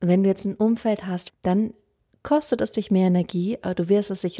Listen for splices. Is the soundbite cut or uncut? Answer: cut